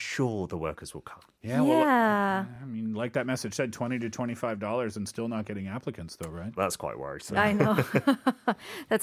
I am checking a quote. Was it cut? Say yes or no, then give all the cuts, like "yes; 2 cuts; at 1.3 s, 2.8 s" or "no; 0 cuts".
no; 0 cuts